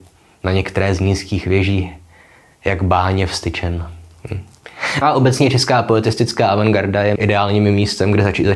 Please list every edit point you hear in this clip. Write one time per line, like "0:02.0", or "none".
0:05.0
0:07.2